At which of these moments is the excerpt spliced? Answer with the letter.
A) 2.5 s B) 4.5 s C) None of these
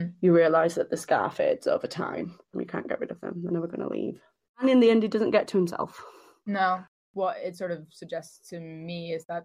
A